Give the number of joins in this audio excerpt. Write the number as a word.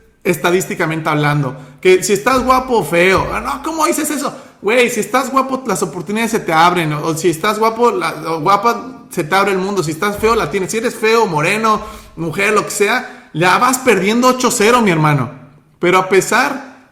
zero